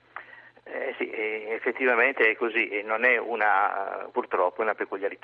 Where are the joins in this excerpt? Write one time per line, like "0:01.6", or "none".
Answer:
0:04.1